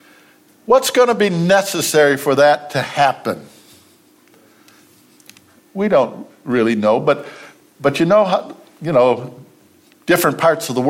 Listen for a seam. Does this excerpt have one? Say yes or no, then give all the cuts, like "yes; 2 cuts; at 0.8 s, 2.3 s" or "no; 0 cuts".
no; 0 cuts